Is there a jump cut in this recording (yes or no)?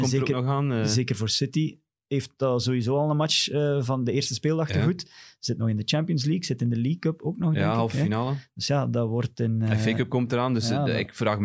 no